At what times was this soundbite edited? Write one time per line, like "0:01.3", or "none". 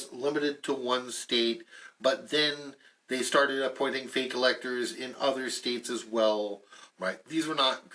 0:06.9